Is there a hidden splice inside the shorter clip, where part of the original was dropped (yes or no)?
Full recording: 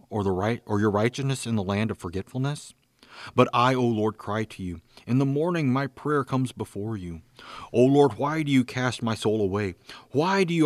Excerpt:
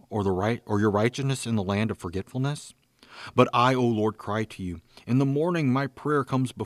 no